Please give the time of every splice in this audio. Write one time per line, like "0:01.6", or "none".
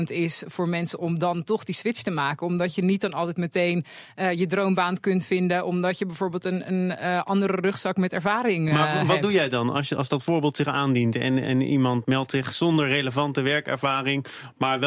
none